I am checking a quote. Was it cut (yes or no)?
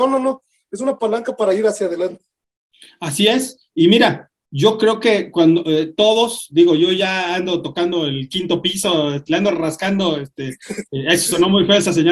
no